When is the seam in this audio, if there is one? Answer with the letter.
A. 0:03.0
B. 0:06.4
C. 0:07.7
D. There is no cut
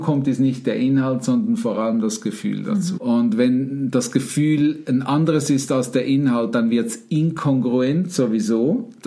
A